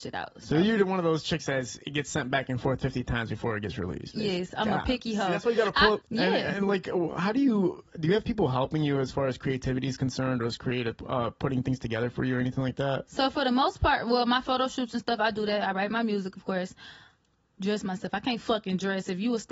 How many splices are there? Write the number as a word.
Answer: one